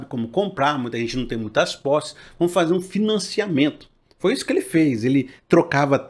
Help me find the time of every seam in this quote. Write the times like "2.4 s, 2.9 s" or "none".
none